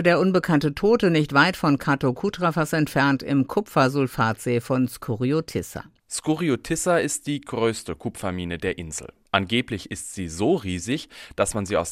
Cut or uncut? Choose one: uncut